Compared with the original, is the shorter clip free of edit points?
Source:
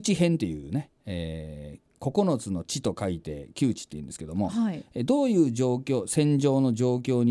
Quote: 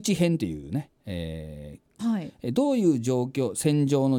no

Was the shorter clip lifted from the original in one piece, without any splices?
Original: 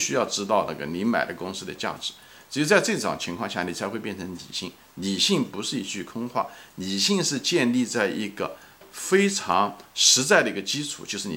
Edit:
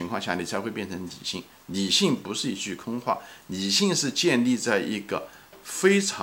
yes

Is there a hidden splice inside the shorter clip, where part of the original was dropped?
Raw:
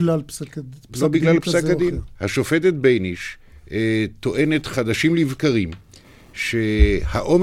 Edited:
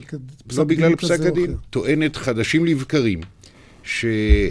yes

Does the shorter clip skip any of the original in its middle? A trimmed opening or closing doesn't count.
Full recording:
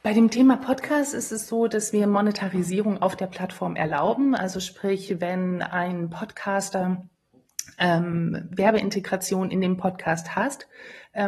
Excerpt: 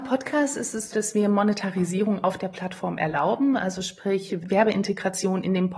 yes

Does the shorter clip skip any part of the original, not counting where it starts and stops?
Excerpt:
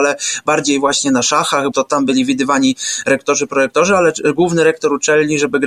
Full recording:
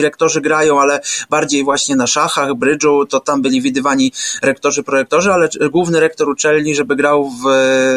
yes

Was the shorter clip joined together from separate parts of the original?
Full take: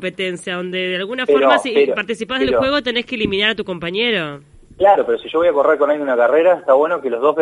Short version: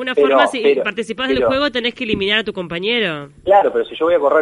yes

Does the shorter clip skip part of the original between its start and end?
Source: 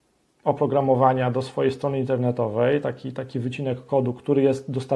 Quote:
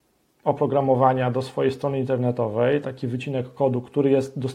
yes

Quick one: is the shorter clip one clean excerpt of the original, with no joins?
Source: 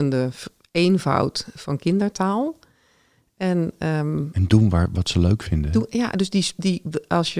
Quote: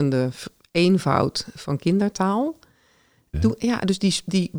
no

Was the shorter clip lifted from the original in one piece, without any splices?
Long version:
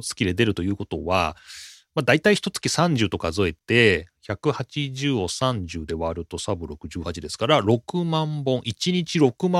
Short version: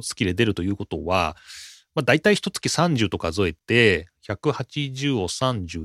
yes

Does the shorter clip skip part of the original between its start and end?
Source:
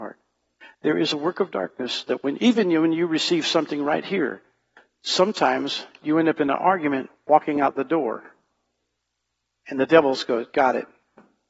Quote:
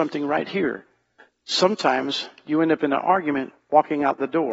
no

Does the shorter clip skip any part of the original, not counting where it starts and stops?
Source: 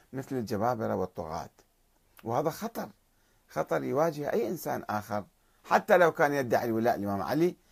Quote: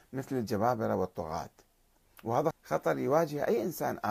yes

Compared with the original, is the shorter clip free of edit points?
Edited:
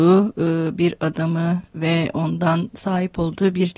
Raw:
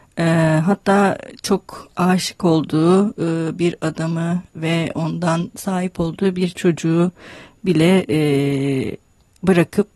yes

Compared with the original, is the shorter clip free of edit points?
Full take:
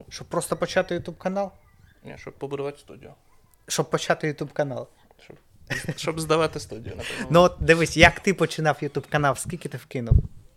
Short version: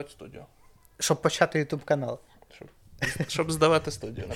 yes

